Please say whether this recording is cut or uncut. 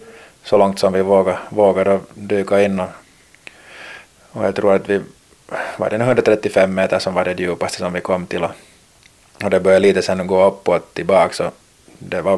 uncut